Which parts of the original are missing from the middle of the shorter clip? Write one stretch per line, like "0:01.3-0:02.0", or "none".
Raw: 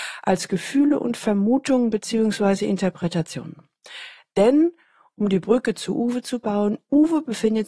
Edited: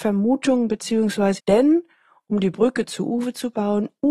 0:02.6-0:04.3